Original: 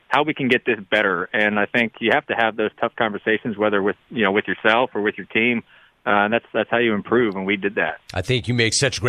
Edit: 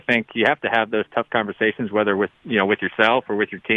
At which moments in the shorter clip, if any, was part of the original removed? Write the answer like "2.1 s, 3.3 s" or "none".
none